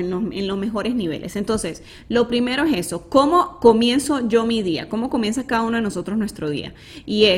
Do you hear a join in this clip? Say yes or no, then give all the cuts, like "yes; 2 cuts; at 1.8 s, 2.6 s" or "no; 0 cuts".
no; 0 cuts